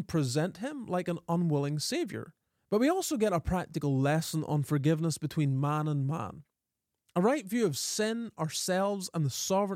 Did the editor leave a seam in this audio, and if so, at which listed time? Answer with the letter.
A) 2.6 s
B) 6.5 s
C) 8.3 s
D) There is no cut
D